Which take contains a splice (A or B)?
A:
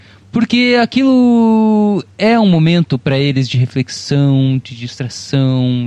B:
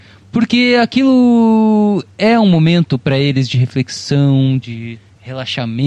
B